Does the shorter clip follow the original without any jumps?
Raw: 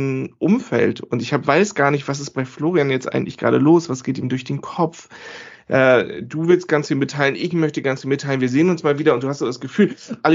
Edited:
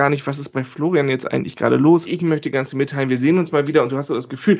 no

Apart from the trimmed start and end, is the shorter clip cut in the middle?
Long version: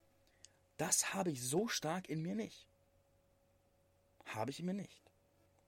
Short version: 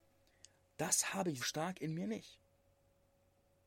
yes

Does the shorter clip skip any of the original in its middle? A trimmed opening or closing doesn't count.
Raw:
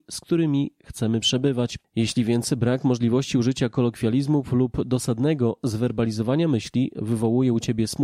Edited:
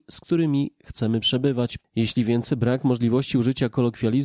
no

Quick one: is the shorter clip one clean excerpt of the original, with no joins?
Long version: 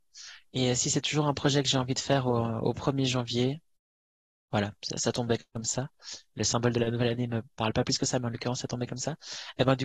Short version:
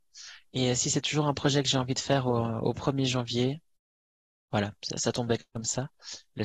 yes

